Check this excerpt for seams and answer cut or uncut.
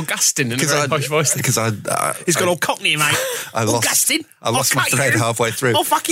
uncut